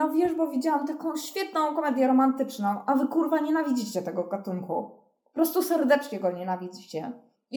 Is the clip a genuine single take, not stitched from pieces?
yes; 0 cuts

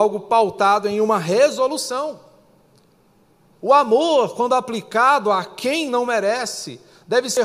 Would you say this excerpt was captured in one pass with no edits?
yes; 0 cuts

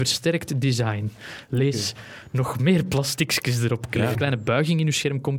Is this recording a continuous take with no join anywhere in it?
no; 1 cut; at 4.1 s

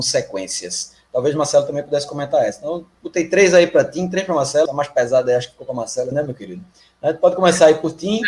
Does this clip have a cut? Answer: yes; 2 cuts; at 4.7 s, 6.1 s

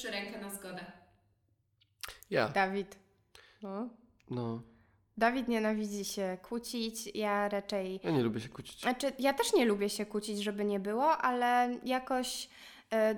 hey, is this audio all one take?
yes; 0 cuts

